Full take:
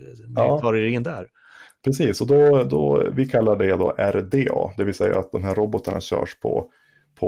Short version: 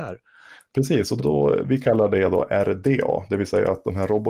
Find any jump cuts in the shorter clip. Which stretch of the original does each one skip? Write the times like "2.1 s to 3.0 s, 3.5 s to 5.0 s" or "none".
2.3 s to 2.7 s